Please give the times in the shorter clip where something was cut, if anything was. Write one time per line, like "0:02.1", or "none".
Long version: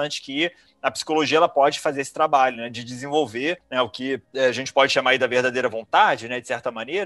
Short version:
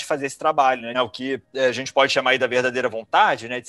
0:00.9